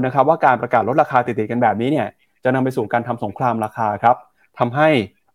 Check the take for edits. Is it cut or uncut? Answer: uncut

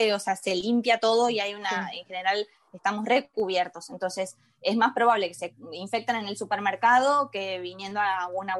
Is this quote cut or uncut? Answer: uncut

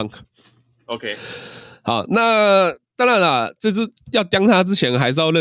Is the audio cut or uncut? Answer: uncut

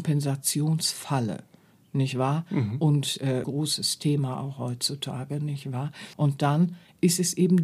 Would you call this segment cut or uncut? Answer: cut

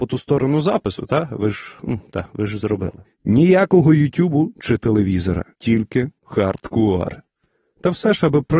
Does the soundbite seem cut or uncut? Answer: cut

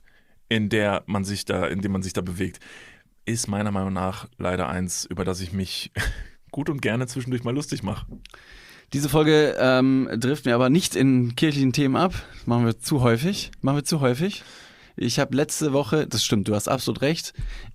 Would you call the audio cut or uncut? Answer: uncut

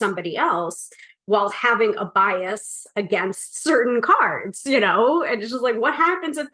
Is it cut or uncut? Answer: uncut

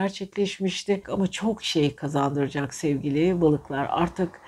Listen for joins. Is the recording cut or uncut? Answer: cut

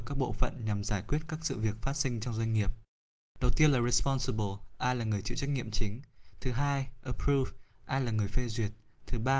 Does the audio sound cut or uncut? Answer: uncut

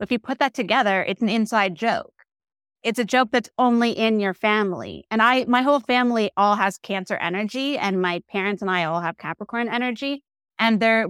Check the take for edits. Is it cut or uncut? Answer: uncut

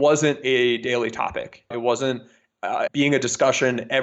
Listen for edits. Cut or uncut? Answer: cut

